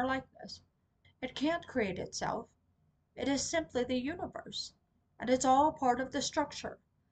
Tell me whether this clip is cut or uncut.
cut